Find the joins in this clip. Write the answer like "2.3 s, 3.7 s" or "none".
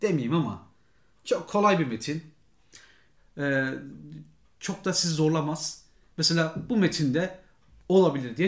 3.2 s

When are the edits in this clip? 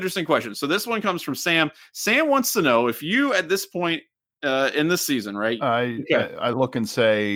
5.6 s

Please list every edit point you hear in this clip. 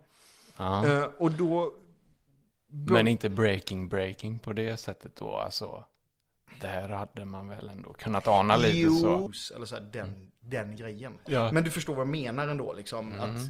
9.3 s, 11.3 s

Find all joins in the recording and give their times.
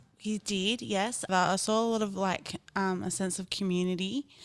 1.3 s

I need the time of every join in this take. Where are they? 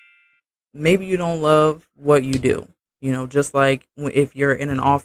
none

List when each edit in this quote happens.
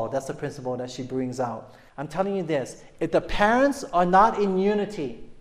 1.9 s

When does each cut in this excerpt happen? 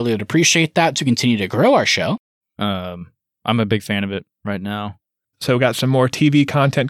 2.4 s, 5.3 s

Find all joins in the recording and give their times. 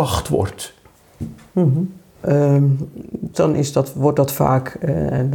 2.2 s, 3.3 s

